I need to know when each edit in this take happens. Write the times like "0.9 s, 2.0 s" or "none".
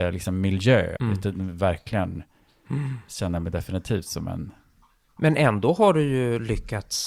1.0 s